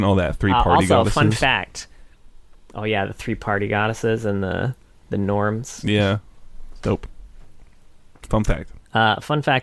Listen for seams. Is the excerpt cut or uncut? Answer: uncut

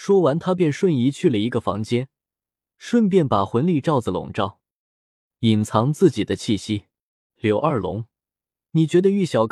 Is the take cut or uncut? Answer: cut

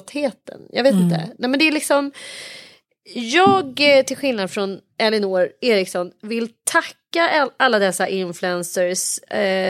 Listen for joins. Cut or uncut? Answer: uncut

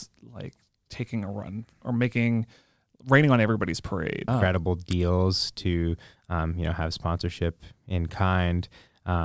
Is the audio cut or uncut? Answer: cut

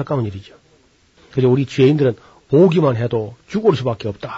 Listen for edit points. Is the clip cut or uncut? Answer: cut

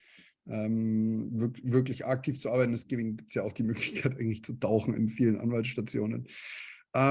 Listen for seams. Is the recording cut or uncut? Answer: uncut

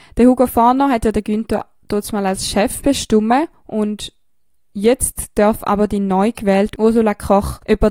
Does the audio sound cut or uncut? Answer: uncut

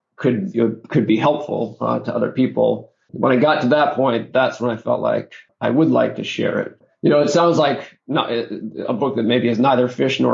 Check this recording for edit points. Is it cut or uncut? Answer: uncut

